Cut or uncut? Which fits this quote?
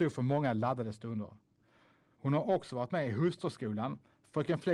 cut